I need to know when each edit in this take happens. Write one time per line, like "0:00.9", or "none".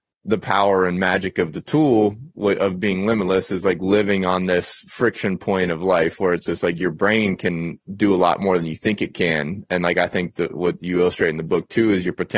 none